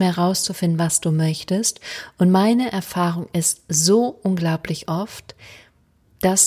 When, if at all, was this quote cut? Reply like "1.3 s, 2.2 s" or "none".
none